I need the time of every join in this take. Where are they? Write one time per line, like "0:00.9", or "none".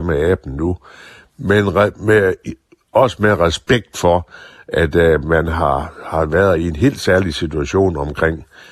none